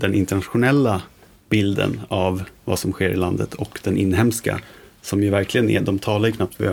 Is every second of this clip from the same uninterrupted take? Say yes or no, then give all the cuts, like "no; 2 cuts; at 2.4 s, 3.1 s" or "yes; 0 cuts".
yes; 0 cuts